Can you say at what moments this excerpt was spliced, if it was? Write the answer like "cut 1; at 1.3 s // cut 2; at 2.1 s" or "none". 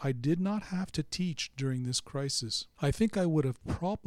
cut 1; at 2.8 s